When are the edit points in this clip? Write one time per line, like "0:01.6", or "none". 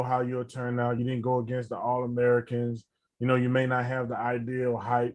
none